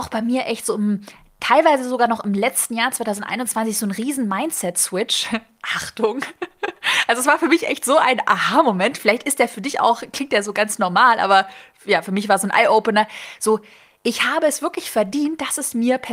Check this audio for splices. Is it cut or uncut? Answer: uncut